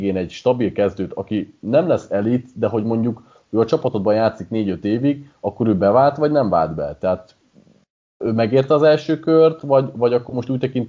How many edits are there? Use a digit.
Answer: 0